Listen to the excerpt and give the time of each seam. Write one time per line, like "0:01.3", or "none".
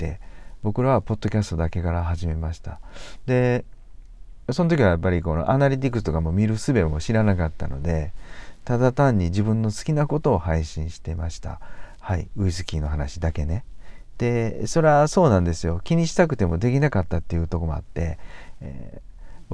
0:14.1